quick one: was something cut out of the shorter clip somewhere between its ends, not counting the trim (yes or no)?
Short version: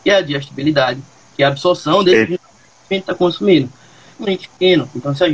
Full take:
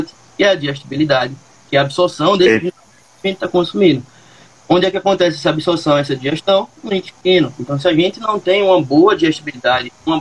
yes